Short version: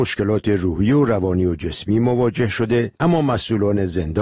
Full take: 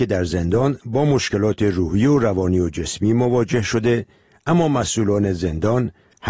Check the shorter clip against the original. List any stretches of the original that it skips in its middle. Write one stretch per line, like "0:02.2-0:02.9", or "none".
0:04.1-0:04.4